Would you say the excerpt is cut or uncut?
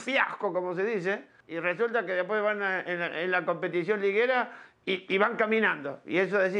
cut